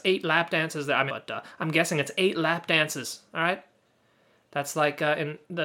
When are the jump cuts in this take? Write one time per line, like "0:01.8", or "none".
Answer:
0:01.1